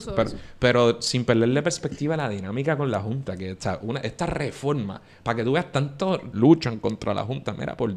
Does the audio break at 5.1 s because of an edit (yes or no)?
no